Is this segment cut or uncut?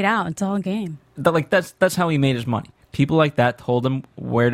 cut